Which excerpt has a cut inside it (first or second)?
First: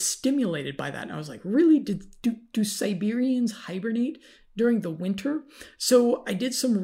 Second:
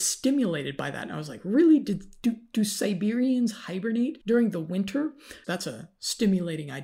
second